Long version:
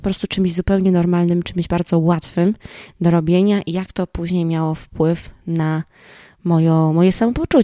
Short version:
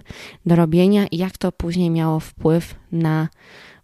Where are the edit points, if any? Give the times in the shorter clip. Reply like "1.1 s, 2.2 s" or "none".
none